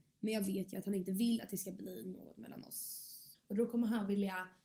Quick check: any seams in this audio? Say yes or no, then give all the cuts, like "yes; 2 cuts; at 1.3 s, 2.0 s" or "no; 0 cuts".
yes; 1 cut; at 3.3 s